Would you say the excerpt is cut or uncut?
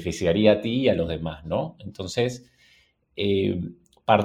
uncut